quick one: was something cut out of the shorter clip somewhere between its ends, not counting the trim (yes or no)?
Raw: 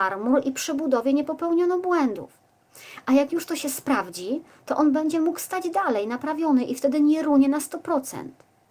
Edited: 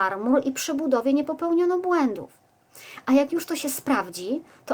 no